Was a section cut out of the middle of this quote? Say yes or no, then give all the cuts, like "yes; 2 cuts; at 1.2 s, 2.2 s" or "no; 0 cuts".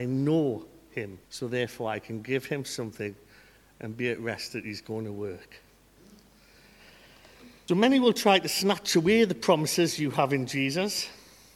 yes; 2 cuts; at 1.2 s, 7.7 s